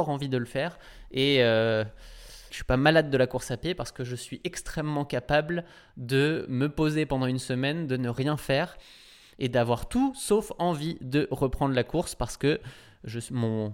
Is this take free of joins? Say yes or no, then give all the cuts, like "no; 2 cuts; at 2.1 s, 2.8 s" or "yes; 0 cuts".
no; 1 cut; at 2.5 s